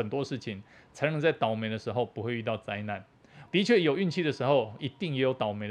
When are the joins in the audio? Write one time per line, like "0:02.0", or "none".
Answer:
0:03.5
0:04.8

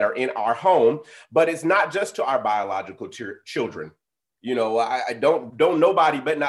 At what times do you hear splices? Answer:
0:04.4
0:05.5

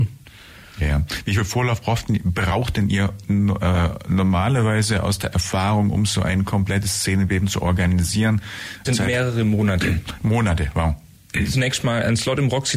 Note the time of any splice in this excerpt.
0:08.8

